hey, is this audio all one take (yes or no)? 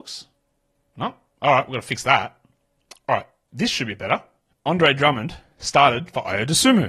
yes